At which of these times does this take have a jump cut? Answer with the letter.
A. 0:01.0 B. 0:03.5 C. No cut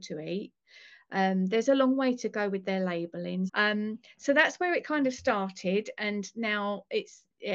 B